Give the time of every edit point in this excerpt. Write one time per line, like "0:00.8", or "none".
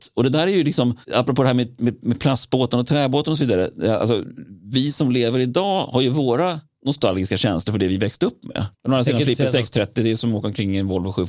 0:01.0
0:08.7